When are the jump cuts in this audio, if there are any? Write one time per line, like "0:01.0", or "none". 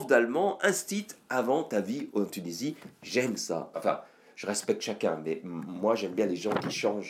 0:03.7